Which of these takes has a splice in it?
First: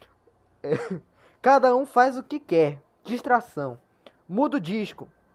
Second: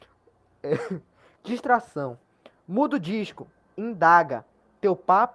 second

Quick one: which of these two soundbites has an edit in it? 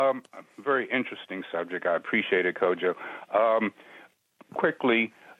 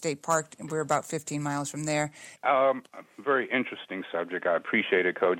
second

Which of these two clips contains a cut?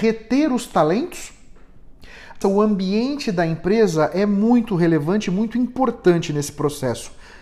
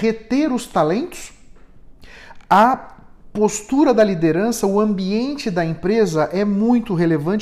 first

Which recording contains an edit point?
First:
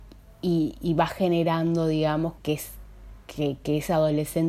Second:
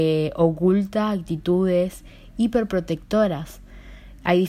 first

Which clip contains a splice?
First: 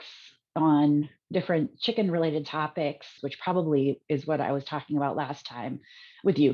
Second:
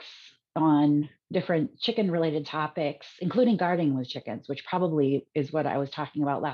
first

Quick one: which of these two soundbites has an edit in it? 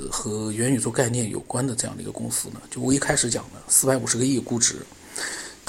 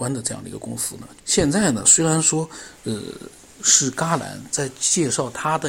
second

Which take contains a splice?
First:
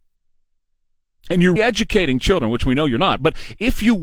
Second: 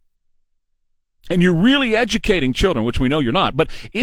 first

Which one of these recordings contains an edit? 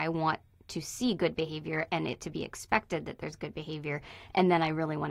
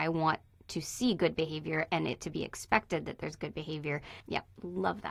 second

